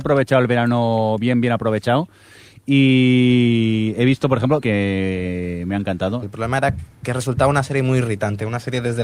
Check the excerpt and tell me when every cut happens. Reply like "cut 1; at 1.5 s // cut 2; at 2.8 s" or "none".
cut 1; at 4.6 s // cut 2; at 6.2 s